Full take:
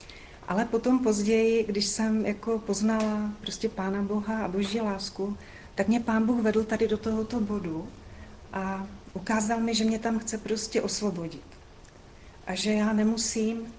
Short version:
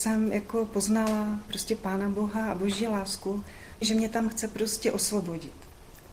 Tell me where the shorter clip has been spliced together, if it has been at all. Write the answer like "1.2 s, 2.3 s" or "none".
3.8 s